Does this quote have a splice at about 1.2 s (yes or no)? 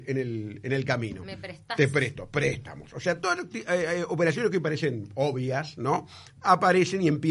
no